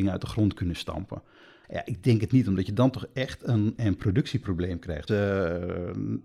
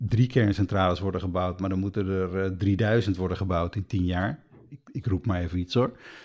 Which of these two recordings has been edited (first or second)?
first